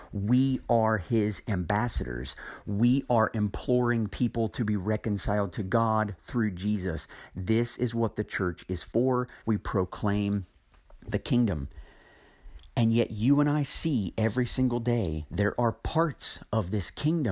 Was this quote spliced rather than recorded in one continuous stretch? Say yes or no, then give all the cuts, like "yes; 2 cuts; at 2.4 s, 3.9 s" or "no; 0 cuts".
yes; 1 cut; at 9.4 s